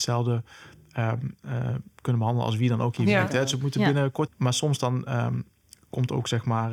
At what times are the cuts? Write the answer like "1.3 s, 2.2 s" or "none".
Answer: 4.3 s